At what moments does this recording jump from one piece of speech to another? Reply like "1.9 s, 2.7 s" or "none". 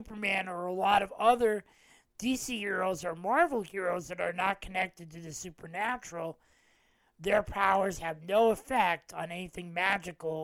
none